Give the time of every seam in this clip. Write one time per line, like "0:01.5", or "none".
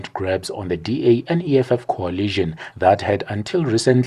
none

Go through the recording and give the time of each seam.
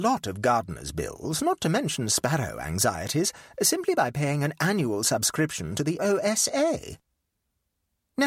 0:06.0

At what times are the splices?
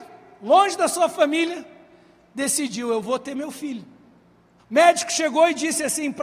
0:04.6

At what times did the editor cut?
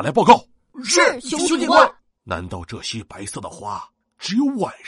0:02.2

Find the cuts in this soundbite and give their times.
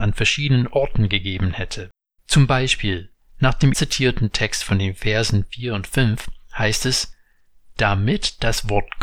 0:02.2
0:03.7

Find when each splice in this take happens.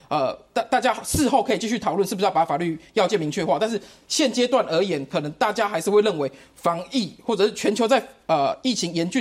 none

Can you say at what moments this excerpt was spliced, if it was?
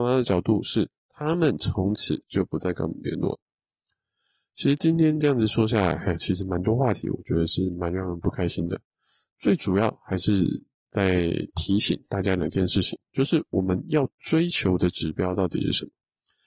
none

